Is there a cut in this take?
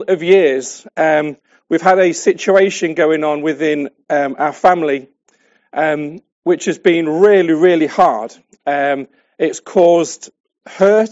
no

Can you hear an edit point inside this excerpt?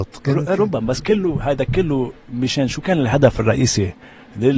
yes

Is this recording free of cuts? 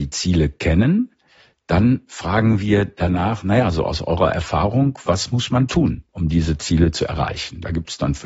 no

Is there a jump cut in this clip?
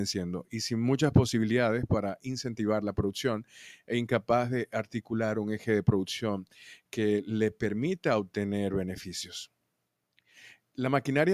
no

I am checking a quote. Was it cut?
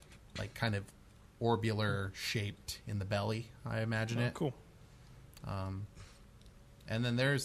yes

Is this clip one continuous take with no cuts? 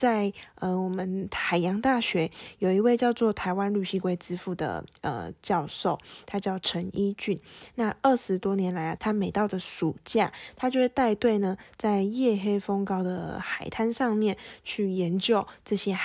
no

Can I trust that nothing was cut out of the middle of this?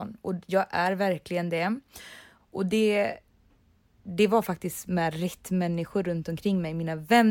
no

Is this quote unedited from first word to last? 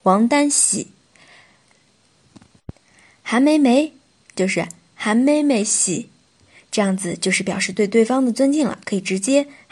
yes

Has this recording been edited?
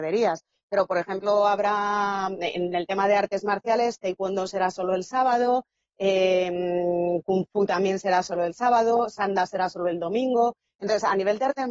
no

